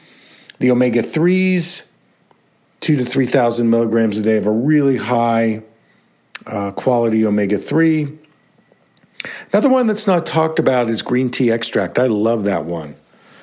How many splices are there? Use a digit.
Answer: 0